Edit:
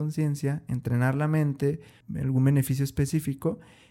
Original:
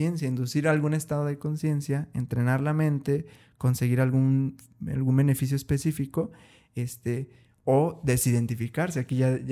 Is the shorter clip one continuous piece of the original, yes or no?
no